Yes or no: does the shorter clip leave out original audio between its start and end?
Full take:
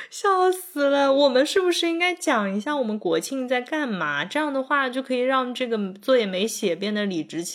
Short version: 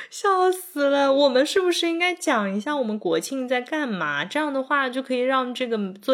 no